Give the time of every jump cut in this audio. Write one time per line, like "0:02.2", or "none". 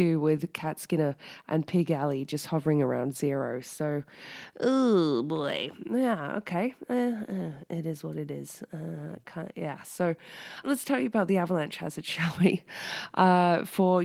0:10.6